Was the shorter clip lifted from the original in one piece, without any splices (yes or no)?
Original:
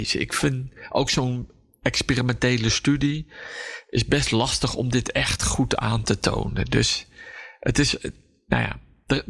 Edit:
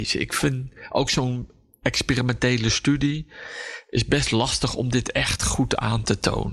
yes